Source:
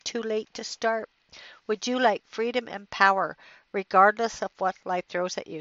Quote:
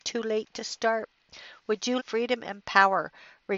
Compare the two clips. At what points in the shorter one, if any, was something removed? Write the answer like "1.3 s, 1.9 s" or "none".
2.0 s